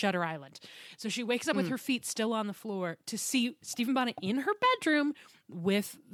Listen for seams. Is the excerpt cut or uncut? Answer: uncut